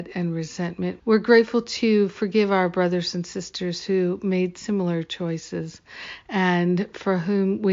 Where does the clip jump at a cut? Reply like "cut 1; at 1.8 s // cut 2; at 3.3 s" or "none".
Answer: cut 1; at 1.0 s